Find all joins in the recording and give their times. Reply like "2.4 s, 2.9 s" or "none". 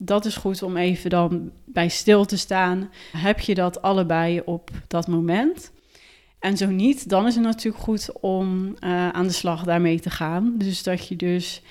3.1 s